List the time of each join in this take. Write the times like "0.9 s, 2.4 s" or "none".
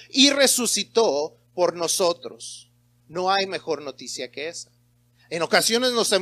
3.0 s